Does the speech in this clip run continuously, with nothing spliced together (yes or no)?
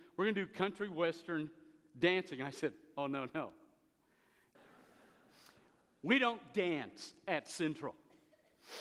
no